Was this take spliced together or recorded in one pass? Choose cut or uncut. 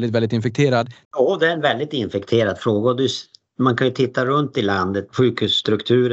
cut